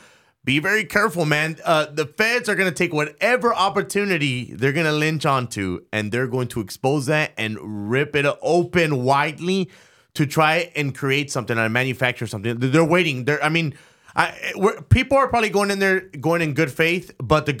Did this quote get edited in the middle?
no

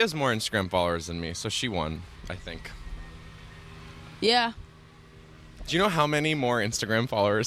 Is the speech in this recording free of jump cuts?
yes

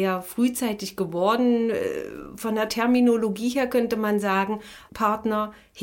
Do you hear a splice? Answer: yes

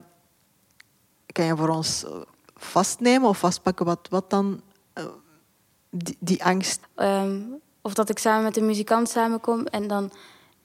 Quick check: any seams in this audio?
yes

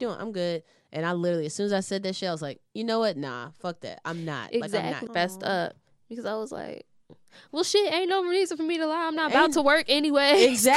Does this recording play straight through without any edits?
no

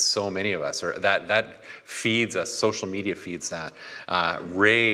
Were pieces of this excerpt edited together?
no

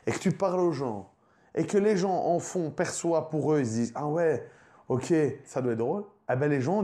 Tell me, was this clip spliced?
yes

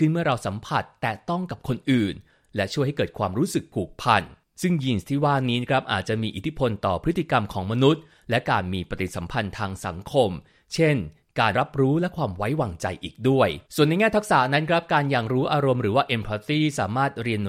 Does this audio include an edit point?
yes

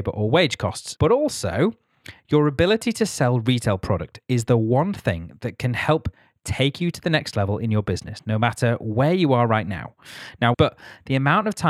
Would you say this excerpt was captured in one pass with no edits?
no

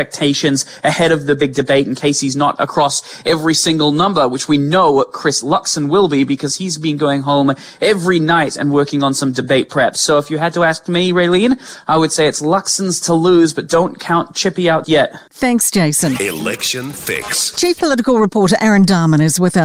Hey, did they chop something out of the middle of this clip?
yes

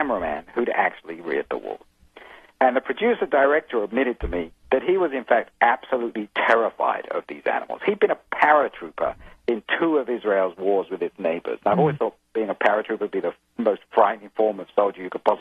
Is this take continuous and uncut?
yes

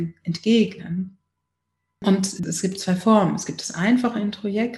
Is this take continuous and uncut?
no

